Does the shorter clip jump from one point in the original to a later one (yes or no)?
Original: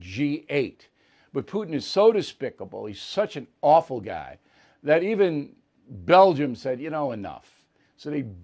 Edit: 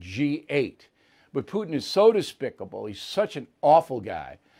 no